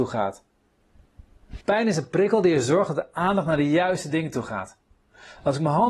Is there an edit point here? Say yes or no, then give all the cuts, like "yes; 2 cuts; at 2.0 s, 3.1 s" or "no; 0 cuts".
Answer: yes; 1 cut; at 1.6 s